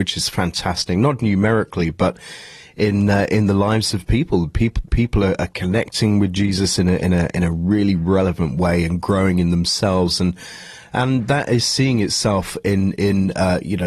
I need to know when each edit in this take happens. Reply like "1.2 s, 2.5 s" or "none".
1.2 s